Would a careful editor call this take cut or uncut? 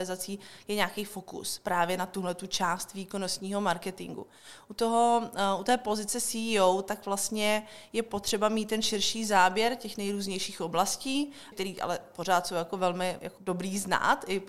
cut